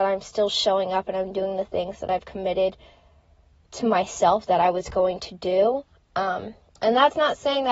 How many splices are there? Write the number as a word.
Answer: zero